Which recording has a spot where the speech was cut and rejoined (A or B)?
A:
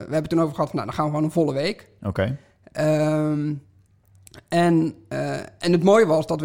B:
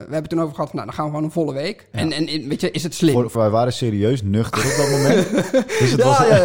B